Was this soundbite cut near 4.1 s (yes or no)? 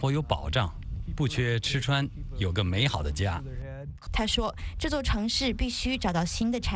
yes